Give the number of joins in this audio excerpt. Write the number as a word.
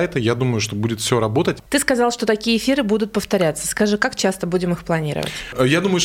zero